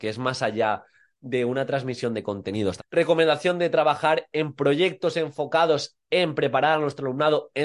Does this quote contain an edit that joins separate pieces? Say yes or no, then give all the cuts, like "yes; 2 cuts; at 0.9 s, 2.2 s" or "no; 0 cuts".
yes; 1 cut; at 2.8 s